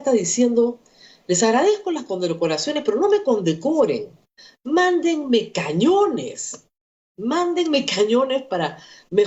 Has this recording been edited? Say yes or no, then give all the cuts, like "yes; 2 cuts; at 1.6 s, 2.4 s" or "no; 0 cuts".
no; 0 cuts